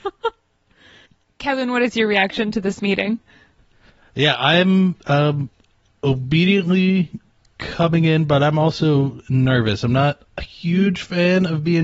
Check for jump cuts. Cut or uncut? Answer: uncut